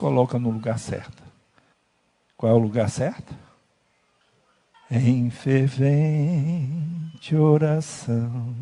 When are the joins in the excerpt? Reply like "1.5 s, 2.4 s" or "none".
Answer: none